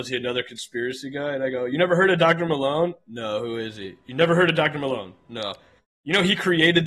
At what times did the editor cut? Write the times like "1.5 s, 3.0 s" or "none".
none